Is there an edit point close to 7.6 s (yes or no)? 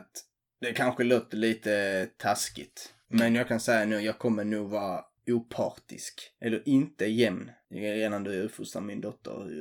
no